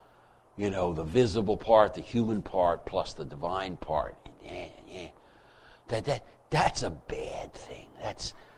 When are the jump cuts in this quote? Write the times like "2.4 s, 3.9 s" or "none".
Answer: none